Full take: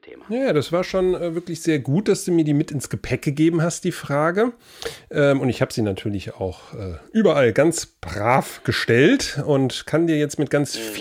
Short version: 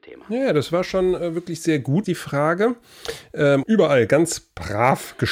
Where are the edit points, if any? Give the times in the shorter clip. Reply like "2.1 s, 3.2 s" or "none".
2.0 s, 3.6 s